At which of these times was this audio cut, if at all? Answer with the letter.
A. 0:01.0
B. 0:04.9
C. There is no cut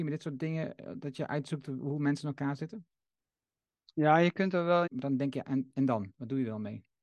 B